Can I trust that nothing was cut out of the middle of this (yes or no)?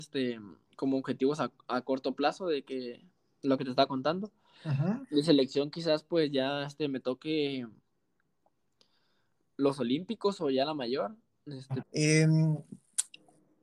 no